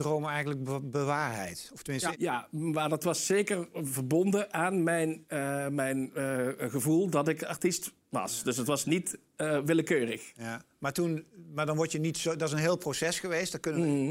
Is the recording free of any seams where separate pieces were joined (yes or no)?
no